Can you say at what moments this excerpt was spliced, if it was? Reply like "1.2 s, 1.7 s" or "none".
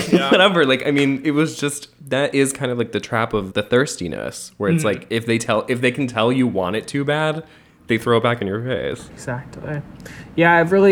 3.5 s, 9.1 s